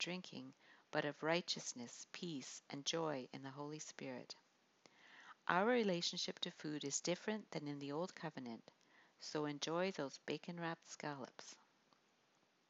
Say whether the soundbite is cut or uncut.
uncut